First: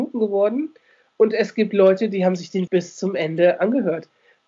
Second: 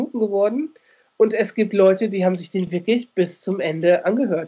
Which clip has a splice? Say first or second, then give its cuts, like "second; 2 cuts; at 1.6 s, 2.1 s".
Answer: first; 1 cut; at 2.7 s